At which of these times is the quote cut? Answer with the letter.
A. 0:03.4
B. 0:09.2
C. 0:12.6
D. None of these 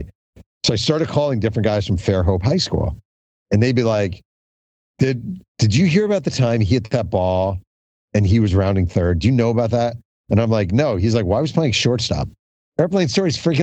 C